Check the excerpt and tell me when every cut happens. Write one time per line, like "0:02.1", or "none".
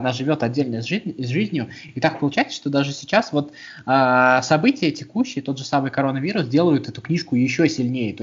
none